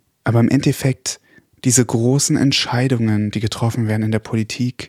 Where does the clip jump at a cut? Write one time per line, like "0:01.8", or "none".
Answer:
none